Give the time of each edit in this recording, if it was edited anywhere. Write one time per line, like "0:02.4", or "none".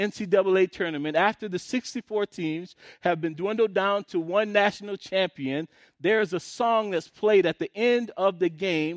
none